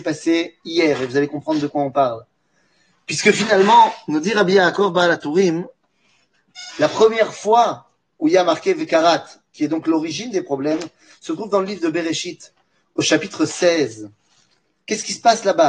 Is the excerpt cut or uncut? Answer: uncut